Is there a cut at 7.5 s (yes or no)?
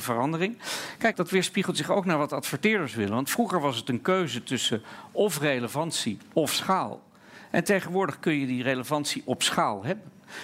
no